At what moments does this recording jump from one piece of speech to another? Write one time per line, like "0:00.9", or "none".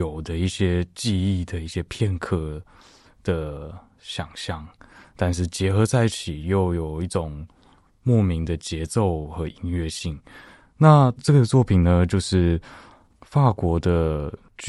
0:11.2